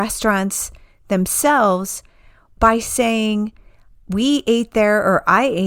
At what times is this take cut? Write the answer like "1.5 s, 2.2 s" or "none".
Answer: none